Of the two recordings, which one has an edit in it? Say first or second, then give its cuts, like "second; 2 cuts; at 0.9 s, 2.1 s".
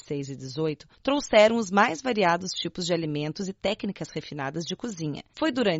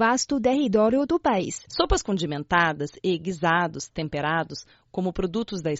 second; 1 cut; at 1.7 s